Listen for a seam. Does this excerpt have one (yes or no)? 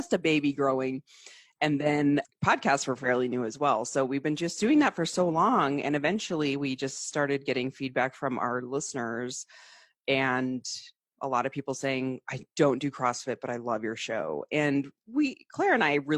yes